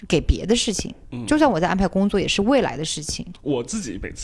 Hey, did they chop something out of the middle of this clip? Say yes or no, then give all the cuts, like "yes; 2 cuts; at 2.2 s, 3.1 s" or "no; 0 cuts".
yes; 1 cut; at 3.3 s